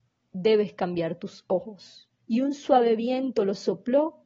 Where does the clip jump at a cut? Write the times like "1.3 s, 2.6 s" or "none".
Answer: 2.2 s